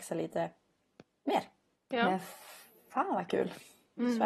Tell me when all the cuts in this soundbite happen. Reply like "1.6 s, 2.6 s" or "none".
1.7 s